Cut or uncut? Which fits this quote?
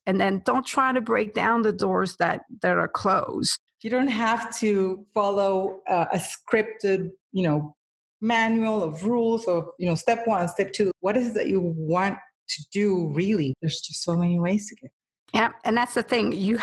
cut